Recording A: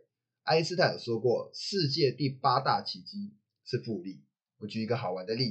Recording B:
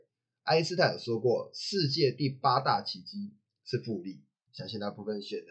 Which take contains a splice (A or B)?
B